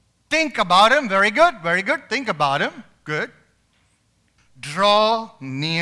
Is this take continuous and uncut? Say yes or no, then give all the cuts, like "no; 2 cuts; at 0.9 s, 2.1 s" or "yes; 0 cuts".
no; 1 cut; at 4.4 s